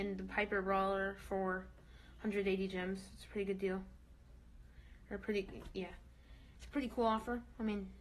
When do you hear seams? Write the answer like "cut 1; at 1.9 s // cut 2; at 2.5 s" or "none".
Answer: cut 1; at 6.5 s